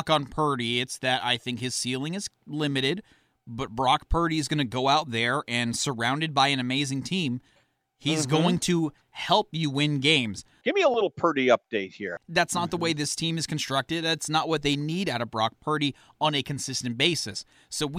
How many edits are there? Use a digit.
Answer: 2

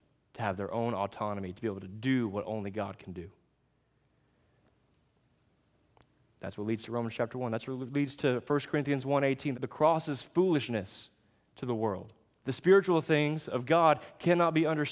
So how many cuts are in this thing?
2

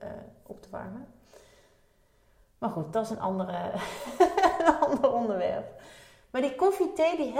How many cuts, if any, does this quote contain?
0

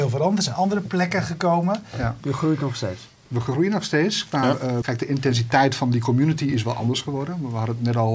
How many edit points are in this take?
2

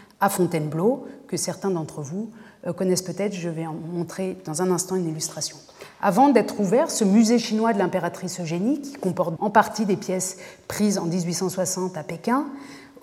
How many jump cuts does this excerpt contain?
1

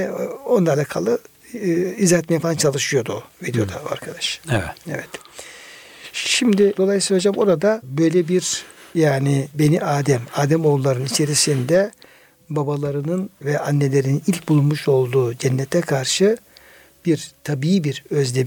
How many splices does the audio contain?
0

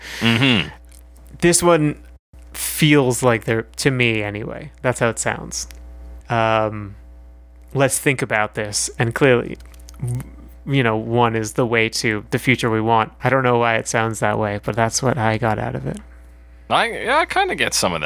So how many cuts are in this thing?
2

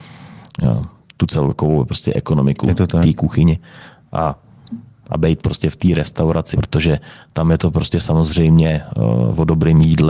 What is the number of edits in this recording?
1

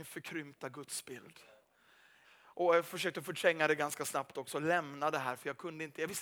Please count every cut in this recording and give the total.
1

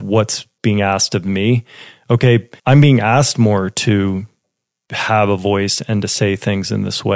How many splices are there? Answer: 1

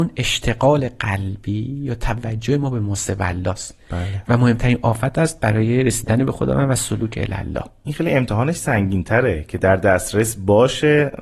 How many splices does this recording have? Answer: 1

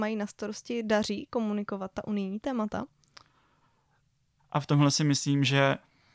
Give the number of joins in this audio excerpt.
1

